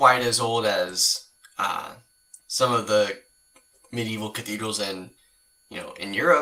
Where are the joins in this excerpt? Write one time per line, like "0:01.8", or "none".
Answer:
0:02.4

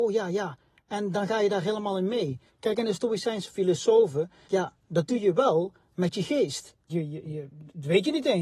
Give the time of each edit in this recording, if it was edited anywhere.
0:02.5
0:04.5
0:06.9

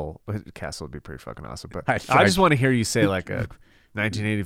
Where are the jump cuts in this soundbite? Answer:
0:01.9

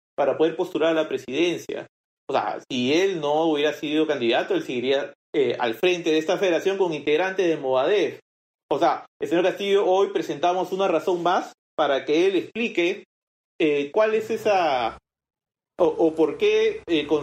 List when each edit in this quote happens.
none

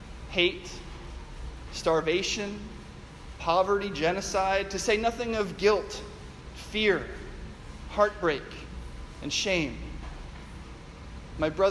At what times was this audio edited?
0:01.7

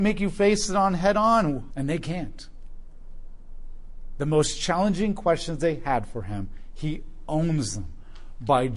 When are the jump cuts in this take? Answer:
0:01.7

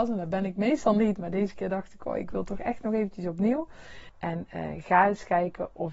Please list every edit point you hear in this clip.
0:04.1

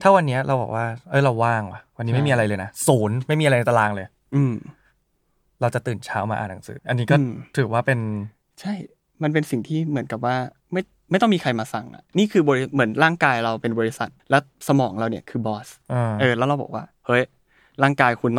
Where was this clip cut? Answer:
0:06.8
0:14.2

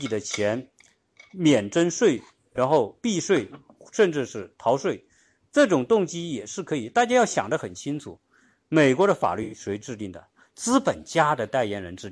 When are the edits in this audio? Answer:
none

